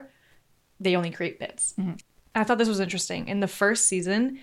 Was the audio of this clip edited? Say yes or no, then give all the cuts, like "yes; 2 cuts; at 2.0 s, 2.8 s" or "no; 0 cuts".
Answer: no; 0 cuts